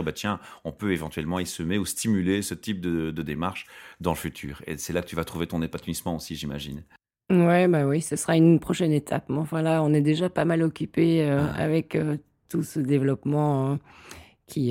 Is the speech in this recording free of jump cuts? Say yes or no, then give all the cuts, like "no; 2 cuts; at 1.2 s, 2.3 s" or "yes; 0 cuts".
yes; 0 cuts